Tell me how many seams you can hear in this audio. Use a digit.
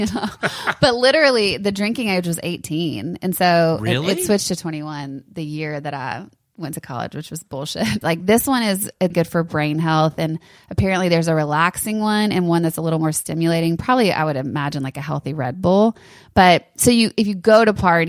2